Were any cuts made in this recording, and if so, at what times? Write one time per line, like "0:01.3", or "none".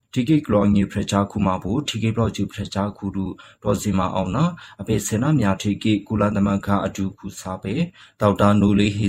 none

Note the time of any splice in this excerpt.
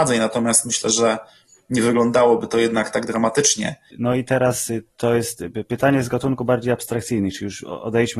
0:03.9

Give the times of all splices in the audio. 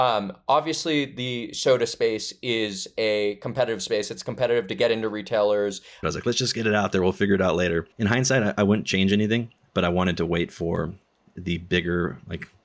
0:06.0
0:07.9

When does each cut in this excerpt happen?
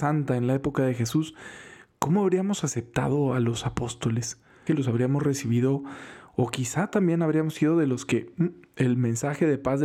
0:04.7

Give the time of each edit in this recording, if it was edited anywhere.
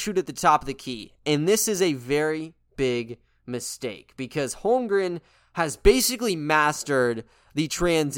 none

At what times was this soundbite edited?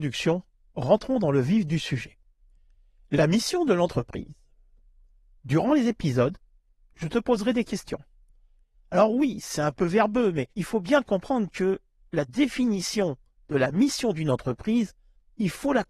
0:05.4
0:08.7
0:10.5

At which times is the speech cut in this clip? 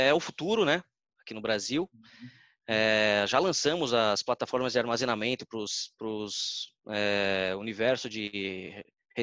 0:01.1

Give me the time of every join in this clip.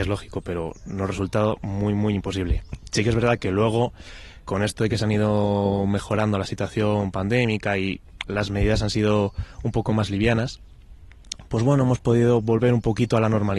0:04.4

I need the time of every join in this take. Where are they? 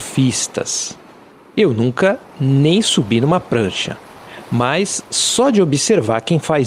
none

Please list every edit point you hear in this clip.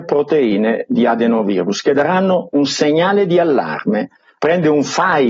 0:04.4

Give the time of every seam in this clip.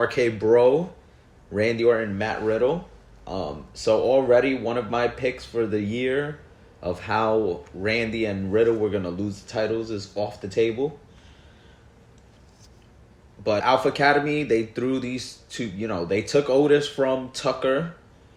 0:13.6

